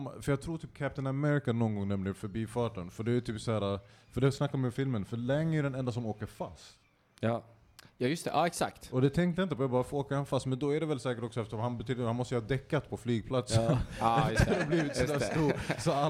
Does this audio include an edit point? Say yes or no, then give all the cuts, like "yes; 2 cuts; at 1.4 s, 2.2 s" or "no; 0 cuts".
no; 0 cuts